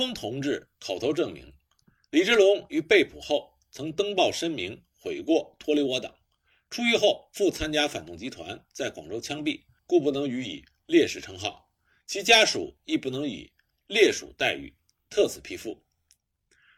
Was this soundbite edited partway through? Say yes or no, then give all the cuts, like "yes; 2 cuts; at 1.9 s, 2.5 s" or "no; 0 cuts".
yes; 1 cut; at 9.8 s